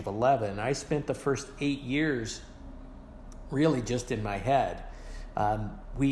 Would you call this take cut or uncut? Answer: uncut